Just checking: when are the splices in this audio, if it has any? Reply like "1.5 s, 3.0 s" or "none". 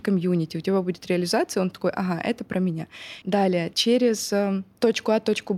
3.2 s